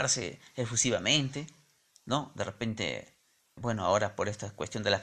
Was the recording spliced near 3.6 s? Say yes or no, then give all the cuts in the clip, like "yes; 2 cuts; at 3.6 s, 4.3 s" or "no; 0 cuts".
yes; 1 cut; at 3.6 s